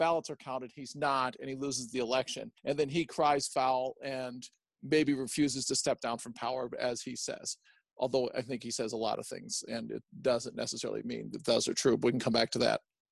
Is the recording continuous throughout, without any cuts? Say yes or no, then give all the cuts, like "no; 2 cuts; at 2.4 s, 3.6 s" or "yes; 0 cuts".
yes; 0 cuts